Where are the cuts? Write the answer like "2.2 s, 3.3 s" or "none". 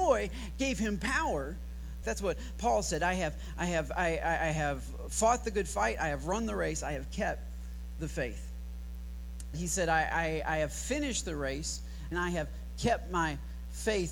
2.0 s, 9.5 s, 12.1 s